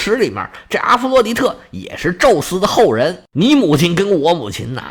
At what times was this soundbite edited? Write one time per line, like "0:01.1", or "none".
none